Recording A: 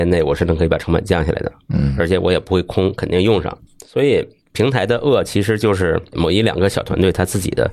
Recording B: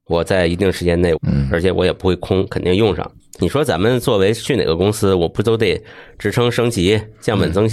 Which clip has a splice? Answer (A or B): B